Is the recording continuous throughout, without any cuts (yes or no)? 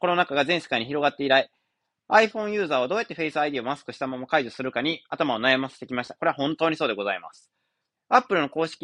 no